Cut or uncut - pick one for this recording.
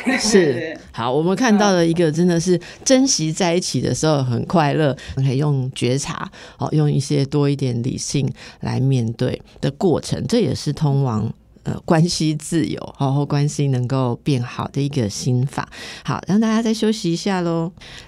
cut